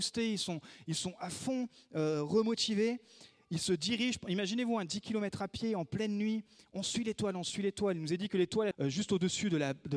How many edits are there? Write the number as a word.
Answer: one